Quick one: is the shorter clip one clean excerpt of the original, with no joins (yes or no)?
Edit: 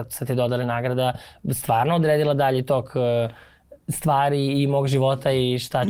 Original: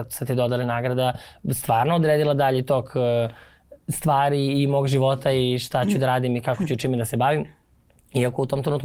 yes